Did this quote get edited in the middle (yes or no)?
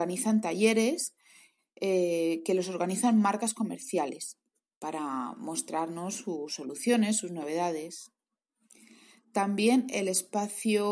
no